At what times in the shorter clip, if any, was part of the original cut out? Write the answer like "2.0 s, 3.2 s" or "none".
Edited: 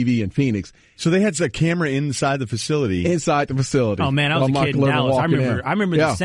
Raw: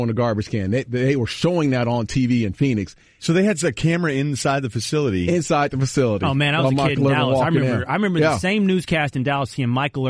none